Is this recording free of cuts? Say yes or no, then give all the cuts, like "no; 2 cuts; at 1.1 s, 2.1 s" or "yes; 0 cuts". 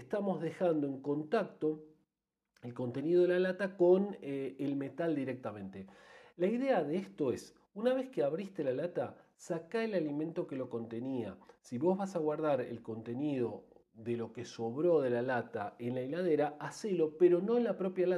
yes; 0 cuts